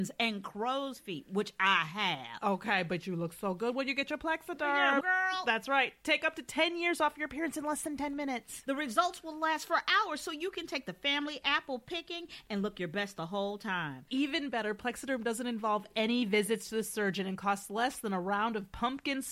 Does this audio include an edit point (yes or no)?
yes